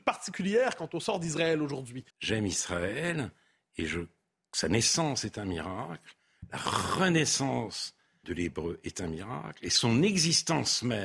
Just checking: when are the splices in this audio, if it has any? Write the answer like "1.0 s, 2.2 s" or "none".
2.1 s, 8.2 s